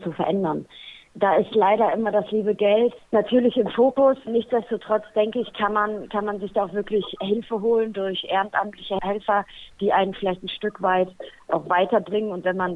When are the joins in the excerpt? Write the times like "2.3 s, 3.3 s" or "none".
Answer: none

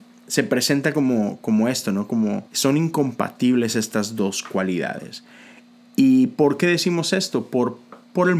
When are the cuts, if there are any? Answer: 2.5 s

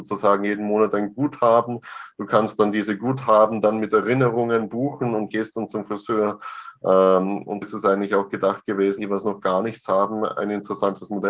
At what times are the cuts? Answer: 7.6 s, 9.0 s

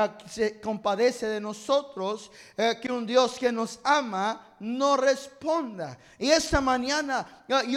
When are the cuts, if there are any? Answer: none

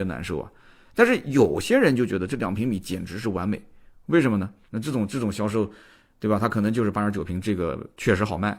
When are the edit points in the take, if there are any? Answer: 4.7 s

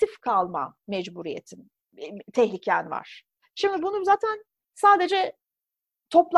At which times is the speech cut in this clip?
3.4 s

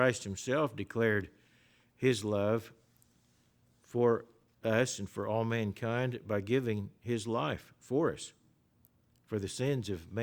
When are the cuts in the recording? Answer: none

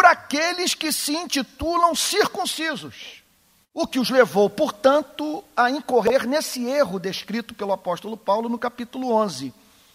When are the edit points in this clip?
3.6 s

